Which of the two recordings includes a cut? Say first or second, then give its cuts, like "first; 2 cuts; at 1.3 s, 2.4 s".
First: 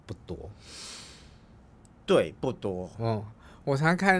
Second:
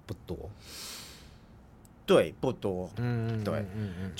second; 1 cut; at 2.9 s